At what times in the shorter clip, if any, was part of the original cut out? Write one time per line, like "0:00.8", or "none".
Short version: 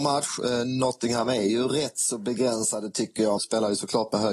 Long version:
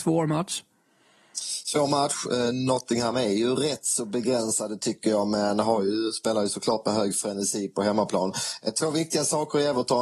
0:03.4